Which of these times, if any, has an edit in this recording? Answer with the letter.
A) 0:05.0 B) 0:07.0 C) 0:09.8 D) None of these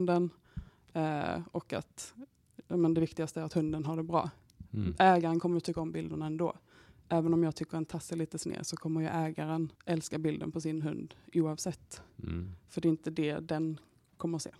C